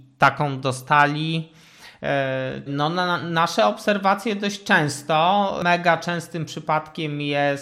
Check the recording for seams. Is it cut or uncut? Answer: cut